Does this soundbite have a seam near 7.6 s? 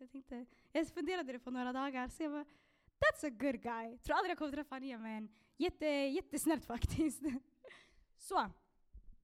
no; 0 cuts

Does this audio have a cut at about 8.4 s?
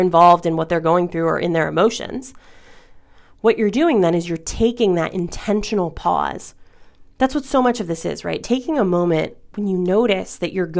no; 0 cuts

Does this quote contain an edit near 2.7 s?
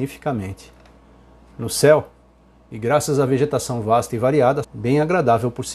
yes; 2 cuts; at 2.7 s, 4.6 s

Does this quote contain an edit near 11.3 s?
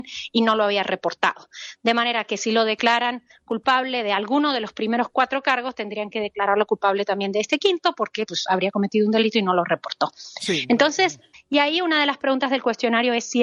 yes; 1 cut; at 11.3 s

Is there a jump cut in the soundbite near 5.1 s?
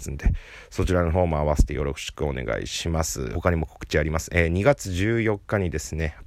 no; 1 cut; at 3.3 s

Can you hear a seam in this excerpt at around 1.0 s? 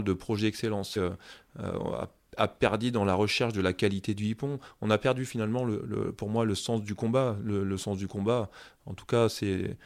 yes; 1 cut; at 1.0 s

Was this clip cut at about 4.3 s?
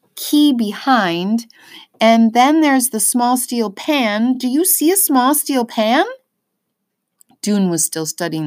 no; 0 cuts

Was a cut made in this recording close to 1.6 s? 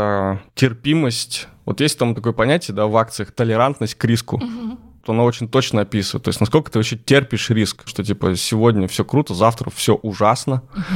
no; 2 cuts; at 5.0 s, 7.9 s

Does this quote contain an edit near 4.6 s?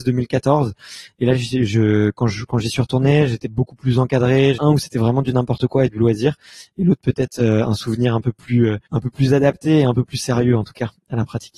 yes; 2 cuts; at 4.6 s, 8.9 s

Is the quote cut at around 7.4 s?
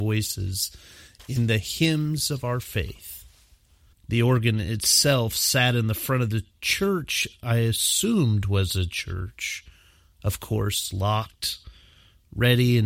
no; 1 cut; at 3.9 s

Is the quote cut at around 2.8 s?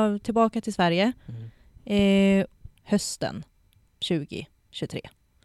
yes; 1 cut; at 2.8 s

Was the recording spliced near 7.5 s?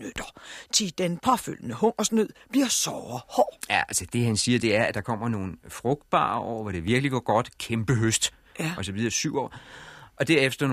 no; 0 cuts

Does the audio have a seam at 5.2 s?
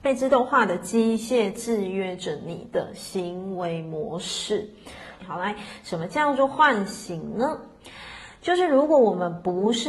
yes; 1 cut; at 5.2 s

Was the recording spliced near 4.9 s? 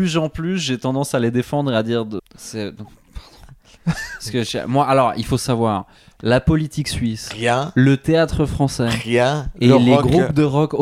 no; 1 cut; at 2.2 s

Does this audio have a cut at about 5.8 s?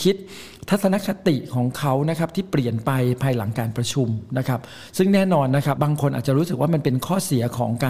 yes; 1 cut; at 5.8 s

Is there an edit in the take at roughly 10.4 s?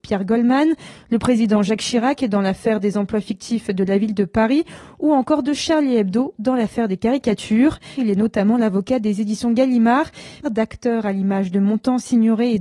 yes; 2 cuts; at 7.9 s, 10.4 s

